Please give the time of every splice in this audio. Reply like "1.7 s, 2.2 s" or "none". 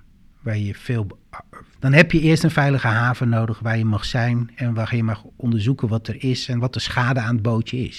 1.8 s

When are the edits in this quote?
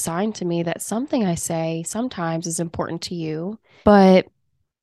3.8 s

